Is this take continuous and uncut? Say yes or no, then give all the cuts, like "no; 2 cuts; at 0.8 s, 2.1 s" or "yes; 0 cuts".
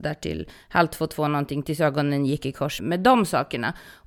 no; 1 cut; at 2.8 s